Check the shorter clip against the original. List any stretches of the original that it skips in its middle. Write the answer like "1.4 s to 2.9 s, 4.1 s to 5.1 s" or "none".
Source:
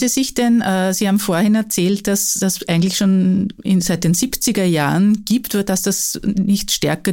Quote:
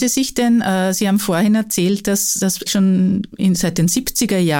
2.7 s to 2.9 s

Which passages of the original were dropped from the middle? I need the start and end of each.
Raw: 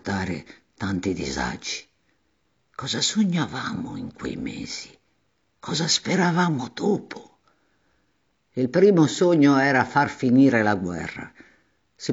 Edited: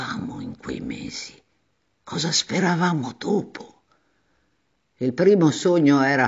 none

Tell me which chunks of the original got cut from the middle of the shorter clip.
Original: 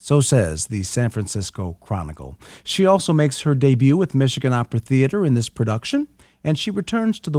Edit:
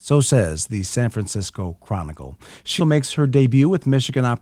2.8 s to 3.1 s

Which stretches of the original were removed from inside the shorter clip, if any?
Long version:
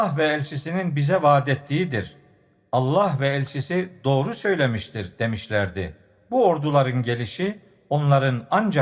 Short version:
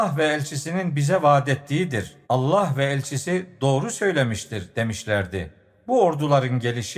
2.2 s to 2.7 s

